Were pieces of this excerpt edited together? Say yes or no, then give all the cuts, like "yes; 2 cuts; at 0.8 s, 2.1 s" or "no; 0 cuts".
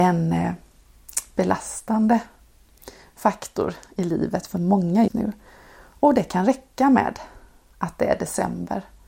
yes; 1 cut; at 5.1 s